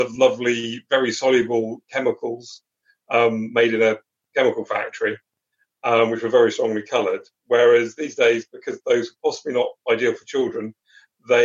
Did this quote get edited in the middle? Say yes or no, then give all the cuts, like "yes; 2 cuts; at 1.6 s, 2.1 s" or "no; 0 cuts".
no; 0 cuts